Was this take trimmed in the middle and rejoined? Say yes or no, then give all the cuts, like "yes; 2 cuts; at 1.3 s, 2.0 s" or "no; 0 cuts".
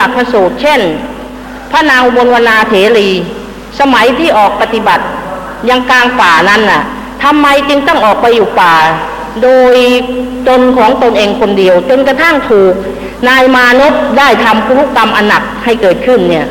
yes; 1 cut; at 4.6 s